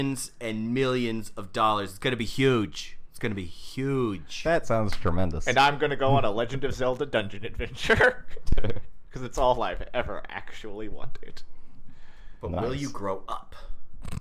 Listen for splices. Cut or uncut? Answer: uncut